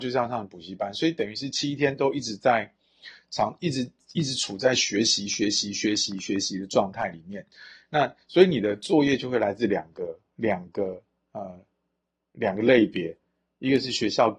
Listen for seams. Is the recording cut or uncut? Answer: uncut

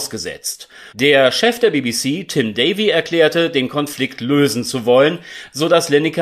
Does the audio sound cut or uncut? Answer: cut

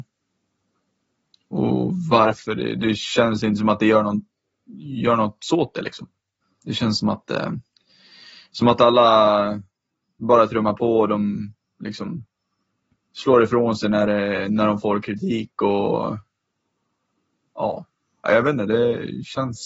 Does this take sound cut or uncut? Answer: uncut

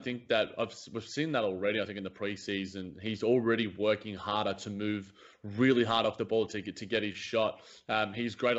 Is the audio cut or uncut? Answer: uncut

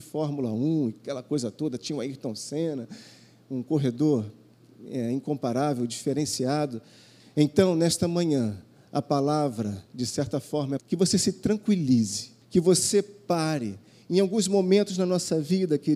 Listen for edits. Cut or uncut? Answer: cut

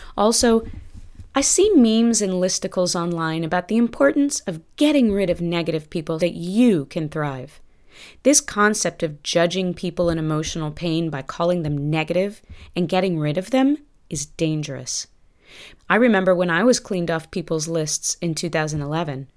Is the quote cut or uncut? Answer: cut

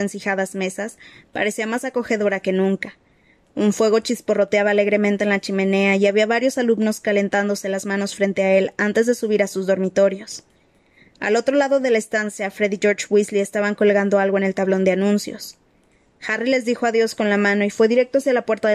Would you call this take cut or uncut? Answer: uncut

